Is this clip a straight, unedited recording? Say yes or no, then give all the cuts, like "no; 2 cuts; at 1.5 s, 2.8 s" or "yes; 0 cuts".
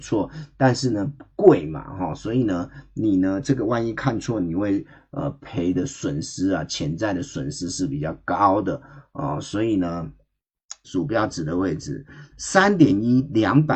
no; 2 cuts; at 10.8 s, 12.3 s